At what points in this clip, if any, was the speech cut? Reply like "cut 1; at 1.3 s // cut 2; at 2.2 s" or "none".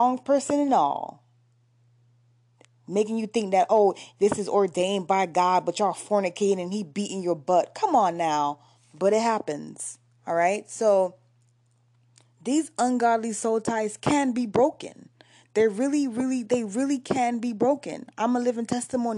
cut 1; at 8.7 s